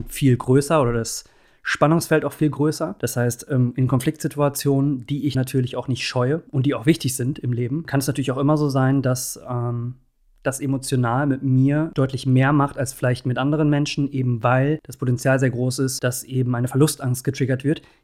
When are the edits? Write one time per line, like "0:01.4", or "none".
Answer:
none